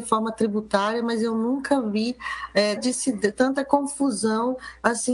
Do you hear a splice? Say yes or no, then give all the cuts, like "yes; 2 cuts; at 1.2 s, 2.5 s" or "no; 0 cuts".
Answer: yes; 1 cut; at 2.8 s